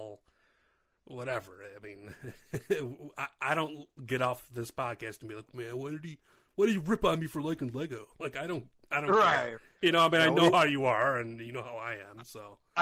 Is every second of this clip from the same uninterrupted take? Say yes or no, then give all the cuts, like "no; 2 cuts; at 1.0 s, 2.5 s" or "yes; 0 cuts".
no; 1 cut; at 5.5 s